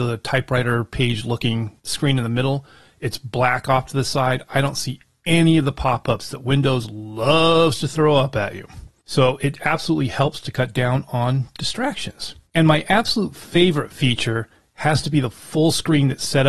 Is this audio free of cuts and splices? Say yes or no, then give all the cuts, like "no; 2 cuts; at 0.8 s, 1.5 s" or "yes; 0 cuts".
yes; 0 cuts